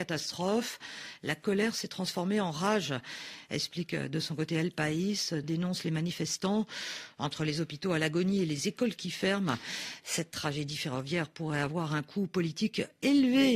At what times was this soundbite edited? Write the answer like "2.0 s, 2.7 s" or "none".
5.4 s